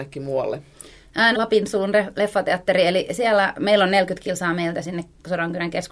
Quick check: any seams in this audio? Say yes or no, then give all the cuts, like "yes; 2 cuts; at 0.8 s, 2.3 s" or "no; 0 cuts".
yes; 1 cut; at 1.3 s